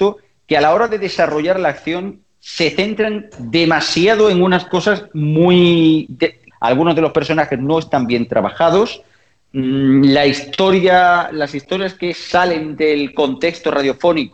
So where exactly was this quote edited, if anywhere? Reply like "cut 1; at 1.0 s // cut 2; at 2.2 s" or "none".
cut 1; at 6.5 s